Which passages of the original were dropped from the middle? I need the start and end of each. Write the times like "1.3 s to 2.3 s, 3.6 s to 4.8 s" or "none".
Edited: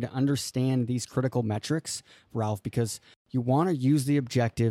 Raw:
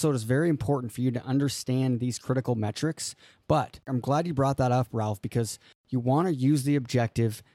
3.4 s to 4.9 s